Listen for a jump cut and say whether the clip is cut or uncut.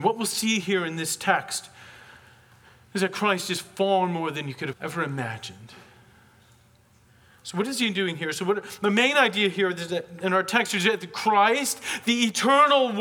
cut